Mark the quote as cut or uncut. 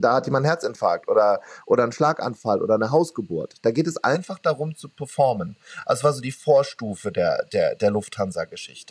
uncut